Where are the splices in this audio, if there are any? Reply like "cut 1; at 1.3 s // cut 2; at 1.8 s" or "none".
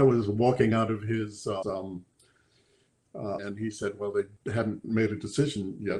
cut 1; at 1.6 s // cut 2; at 3.4 s

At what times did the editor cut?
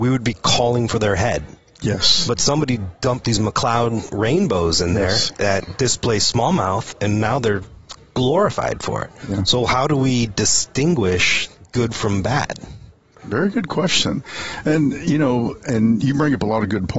none

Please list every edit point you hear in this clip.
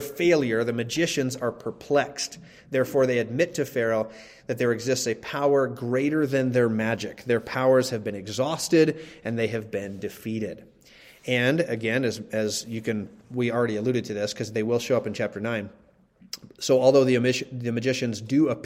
none

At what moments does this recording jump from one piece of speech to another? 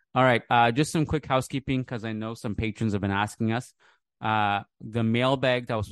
none

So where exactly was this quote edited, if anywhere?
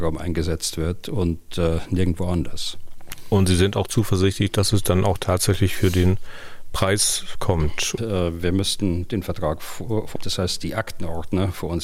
cut 1; at 8.0 s // cut 2; at 10.2 s

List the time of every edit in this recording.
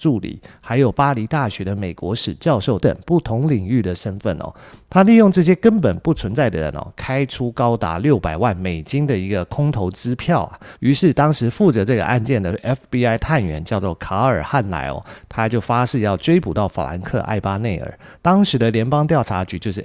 cut 1; at 2.8 s // cut 2; at 10.7 s // cut 3; at 18.1 s

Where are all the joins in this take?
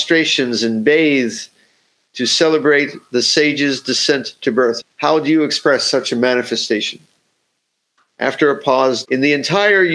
cut 1; at 4.8 s // cut 2; at 9.0 s

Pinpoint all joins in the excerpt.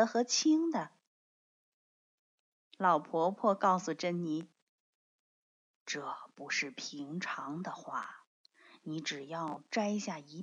none

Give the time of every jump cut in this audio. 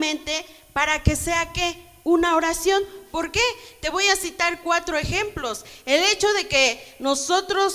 none

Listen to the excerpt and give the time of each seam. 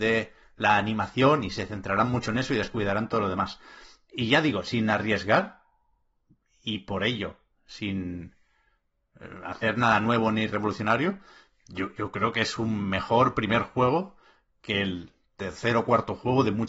none

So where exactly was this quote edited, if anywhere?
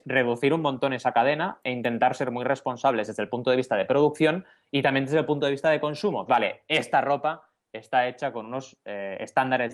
cut 1; at 6.3 s

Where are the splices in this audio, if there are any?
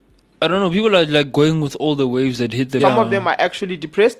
cut 1; at 2.8 s

